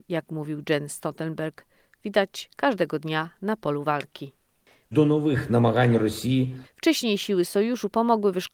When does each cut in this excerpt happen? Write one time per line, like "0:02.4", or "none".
0:04.9
0:06.6